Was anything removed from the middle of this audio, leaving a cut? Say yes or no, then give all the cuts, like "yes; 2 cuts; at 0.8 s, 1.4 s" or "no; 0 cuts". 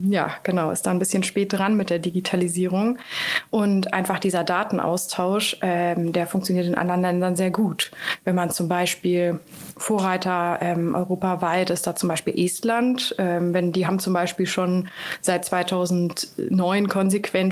no; 0 cuts